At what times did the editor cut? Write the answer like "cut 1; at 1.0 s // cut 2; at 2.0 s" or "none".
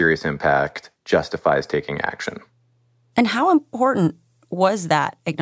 none